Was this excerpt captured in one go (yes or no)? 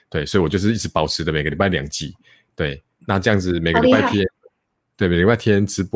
yes